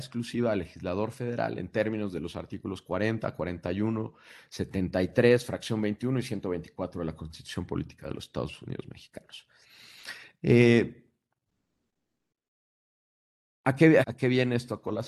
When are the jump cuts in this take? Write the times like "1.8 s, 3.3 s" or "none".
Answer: 14.0 s